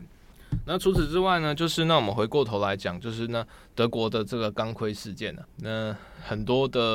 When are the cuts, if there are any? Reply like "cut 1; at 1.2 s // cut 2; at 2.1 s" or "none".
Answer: cut 1; at 5.4 s